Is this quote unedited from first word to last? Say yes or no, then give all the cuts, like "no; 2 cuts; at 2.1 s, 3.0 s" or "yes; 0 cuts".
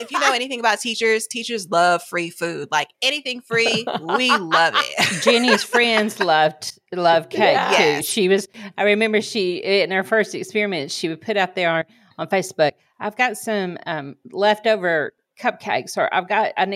yes; 0 cuts